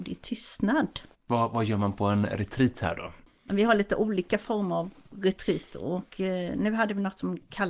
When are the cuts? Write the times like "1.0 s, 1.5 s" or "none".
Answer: 1.1 s